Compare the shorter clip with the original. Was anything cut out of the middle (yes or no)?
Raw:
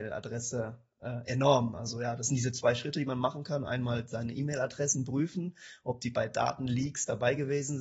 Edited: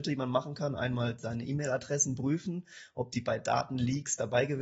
no